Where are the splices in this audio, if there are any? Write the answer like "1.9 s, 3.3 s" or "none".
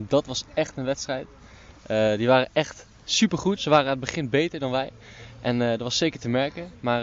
3.6 s

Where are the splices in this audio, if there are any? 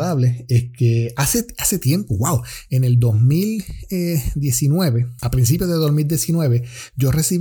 none

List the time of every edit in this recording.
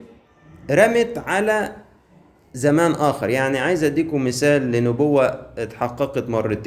none

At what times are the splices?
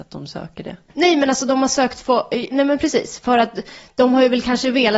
2.5 s

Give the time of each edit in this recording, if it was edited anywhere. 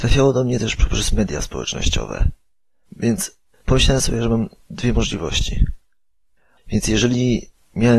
2.8 s, 6.6 s

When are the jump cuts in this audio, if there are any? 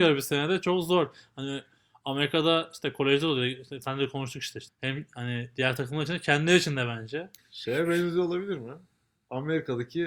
4.7 s, 7.4 s

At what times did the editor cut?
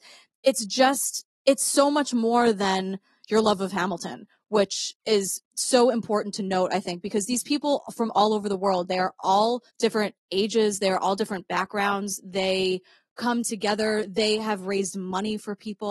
9.7 s

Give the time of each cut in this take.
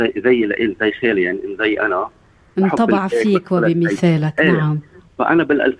none

